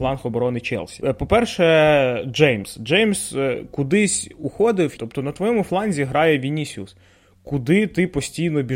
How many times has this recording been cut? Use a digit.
1